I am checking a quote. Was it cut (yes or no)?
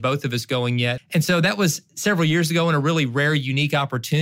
yes